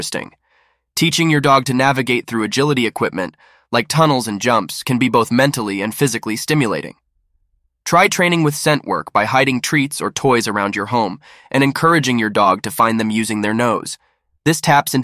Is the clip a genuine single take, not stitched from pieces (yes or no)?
yes